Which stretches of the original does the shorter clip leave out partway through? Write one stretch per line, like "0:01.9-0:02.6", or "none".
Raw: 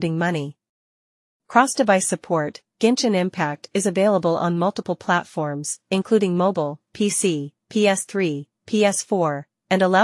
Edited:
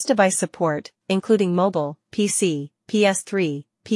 0:02.7-0:05.8